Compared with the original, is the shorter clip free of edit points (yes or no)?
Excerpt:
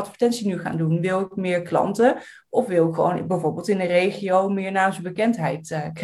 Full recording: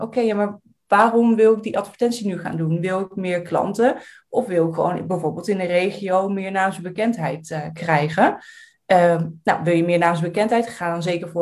yes